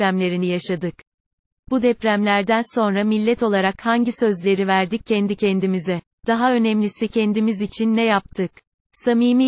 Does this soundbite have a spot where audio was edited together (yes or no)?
yes